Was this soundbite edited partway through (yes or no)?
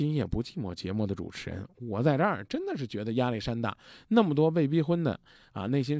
no